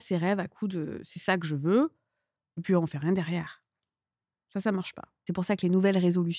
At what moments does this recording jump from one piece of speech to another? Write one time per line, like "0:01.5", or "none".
none